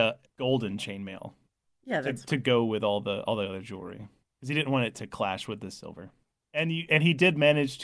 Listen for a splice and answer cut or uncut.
cut